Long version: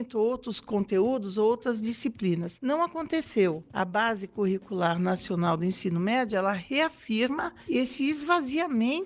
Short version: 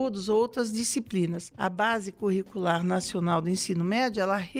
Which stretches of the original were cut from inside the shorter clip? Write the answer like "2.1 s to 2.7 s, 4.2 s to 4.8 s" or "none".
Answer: 2.6 s to 3.7 s